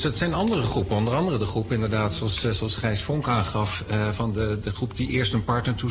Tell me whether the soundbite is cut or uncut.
uncut